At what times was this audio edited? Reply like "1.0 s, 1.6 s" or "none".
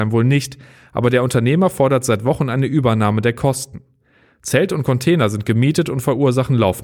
none